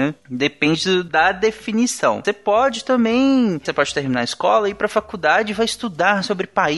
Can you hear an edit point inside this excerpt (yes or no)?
yes